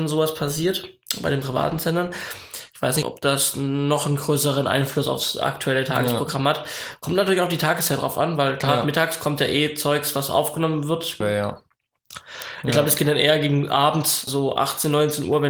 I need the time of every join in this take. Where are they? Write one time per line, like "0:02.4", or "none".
0:03.0
0:11.2
0:14.3